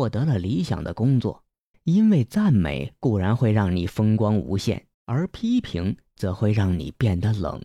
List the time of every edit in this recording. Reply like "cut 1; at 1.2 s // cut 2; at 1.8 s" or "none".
cut 1; at 1.7 s // cut 2; at 4.9 s